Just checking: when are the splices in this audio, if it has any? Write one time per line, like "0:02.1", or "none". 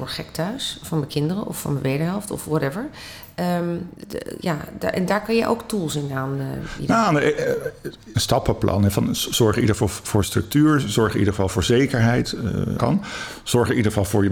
0:08.1
0:12.8